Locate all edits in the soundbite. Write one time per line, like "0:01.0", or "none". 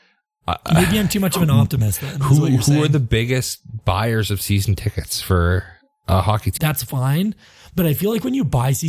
0:06.6